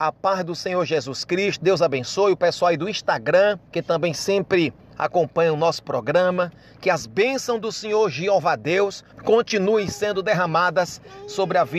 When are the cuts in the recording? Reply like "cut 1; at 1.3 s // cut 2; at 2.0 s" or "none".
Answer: cut 1; at 3.7 s // cut 2; at 9.1 s